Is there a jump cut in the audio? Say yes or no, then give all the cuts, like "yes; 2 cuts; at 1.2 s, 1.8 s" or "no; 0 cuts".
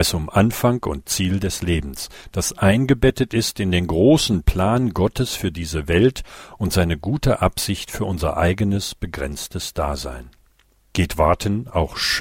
yes; 1 cut; at 10.9 s